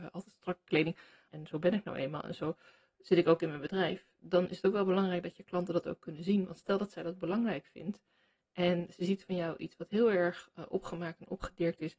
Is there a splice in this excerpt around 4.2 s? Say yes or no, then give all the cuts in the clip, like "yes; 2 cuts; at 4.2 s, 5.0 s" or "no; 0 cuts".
no; 1 cut; at 1.3 s